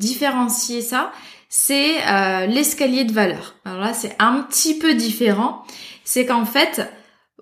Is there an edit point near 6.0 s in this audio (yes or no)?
no